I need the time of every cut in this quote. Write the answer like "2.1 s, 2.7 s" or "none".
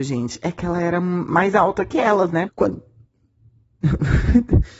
2.5 s